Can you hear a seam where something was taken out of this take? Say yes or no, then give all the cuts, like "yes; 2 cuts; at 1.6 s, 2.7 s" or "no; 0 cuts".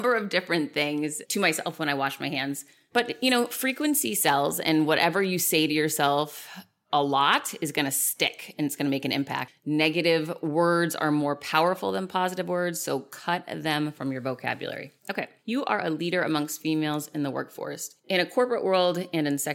yes; 1 cut; at 9.5 s